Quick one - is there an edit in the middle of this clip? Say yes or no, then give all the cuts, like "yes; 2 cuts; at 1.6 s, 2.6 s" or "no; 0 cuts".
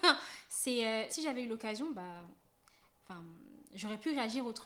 yes; 1 cut; at 1.1 s